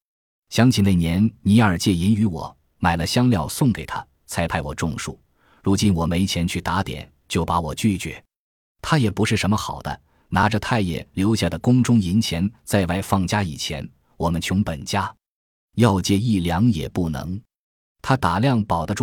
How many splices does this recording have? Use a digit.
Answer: 0